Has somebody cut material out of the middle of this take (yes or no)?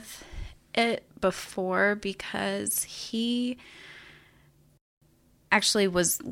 no